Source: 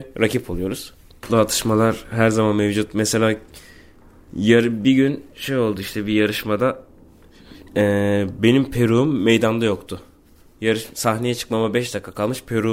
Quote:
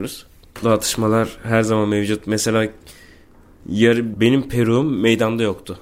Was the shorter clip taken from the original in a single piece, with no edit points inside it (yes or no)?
no